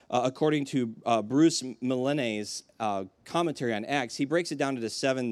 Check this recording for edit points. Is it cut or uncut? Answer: uncut